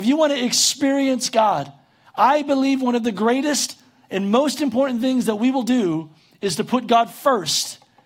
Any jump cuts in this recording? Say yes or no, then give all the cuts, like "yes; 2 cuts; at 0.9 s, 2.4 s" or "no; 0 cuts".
no; 0 cuts